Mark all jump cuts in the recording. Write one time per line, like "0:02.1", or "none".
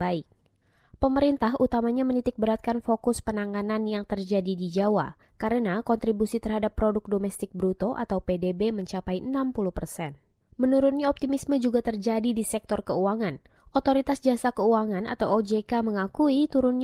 none